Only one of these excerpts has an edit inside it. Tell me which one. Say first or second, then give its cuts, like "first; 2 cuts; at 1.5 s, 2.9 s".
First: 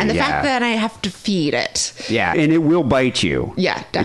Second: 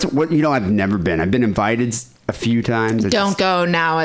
first; 1 cut; at 2.3 s